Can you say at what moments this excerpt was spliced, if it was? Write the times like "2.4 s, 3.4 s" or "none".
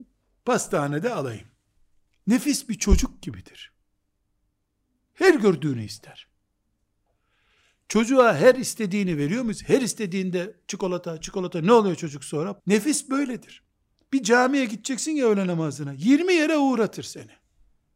11.2 s, 12.6 s